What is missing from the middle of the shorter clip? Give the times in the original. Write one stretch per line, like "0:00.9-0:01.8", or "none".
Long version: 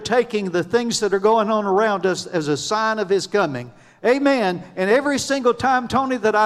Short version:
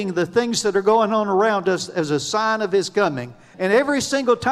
0:03.9-0:04.7